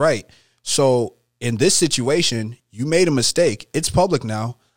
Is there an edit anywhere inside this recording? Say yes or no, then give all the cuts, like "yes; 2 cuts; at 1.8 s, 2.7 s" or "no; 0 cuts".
yes; 1 cut; at 2.6 s